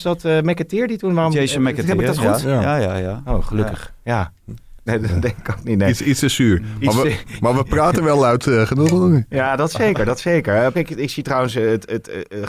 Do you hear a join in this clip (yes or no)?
yes